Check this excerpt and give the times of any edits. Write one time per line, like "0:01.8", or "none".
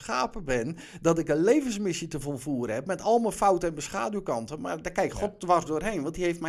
none

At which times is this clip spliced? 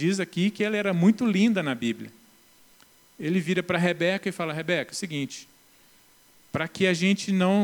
0:03.0

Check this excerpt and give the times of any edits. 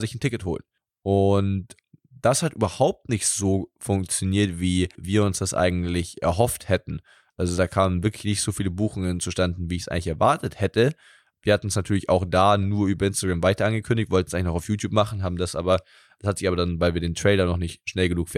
none

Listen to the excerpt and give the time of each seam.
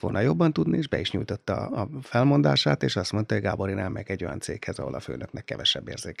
0:01.7

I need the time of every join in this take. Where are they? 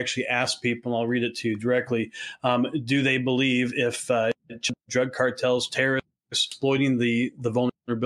none

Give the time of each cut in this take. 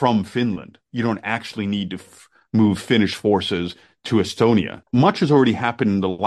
0:04.8

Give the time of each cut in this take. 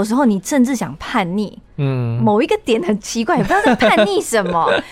none

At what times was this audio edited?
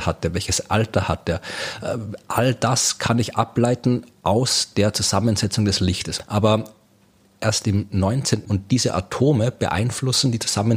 0:06.2
0:08.4

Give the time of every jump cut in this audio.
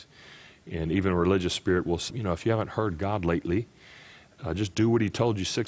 0:02.1

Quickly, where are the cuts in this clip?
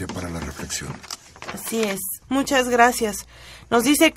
0:02.2

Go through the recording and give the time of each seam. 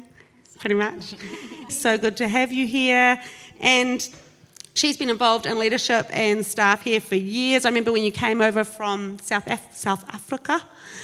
0:01.7

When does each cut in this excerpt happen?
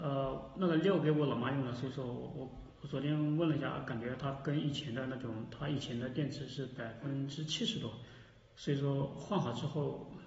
none

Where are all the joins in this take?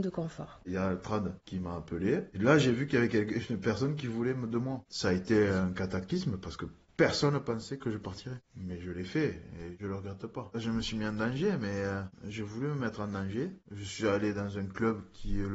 none

